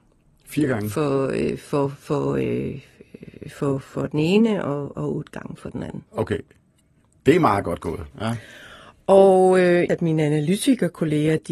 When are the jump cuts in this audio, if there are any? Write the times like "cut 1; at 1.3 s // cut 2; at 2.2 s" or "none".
cut 1; at 6.1 s // cut 2; at 8.1 s // cut 3; at 9.9 s